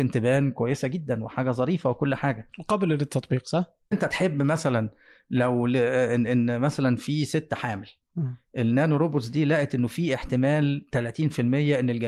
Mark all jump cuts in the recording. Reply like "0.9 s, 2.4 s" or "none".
3.9 s